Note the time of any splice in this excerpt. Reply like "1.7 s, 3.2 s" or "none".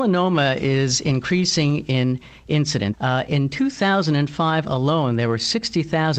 2.9 s